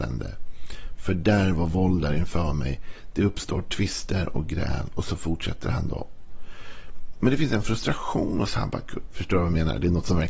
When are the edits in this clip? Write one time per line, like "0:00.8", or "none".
0:09.1